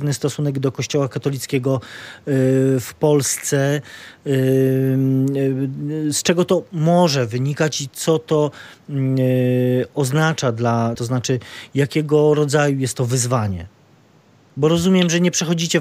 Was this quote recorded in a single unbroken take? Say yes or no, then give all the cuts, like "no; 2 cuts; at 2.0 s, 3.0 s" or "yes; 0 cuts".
no; 1 cut; at 10.9 s